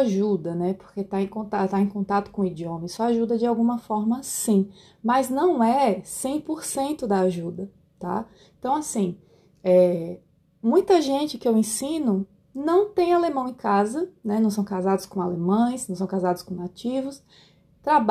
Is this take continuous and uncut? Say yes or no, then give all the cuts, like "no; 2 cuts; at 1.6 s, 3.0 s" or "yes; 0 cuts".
yes; 0 cuts